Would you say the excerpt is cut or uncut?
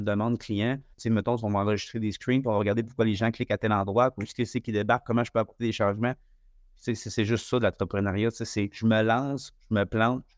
cut